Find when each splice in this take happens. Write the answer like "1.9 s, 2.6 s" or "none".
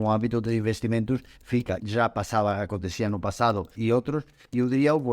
1.8 s, 3.7 s

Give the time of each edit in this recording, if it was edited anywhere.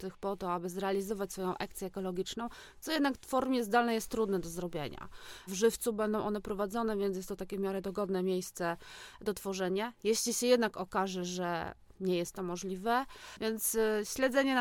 5.5 s, 13.4 s

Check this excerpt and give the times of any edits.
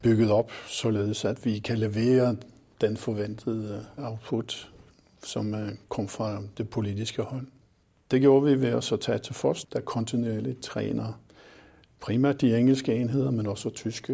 9.7 s

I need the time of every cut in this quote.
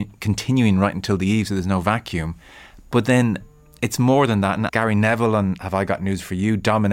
4.7 s

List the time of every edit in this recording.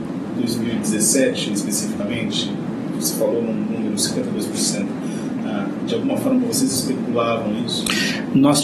none

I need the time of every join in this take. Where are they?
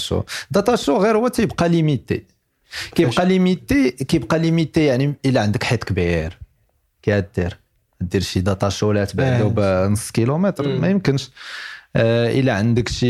none

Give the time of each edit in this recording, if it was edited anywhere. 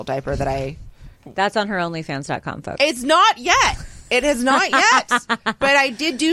1.2 s

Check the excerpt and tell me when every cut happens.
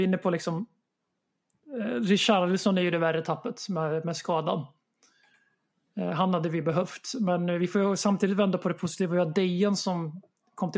none

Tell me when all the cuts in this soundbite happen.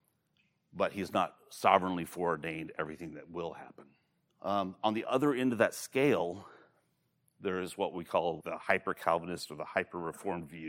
4.3 s, 8.4 s

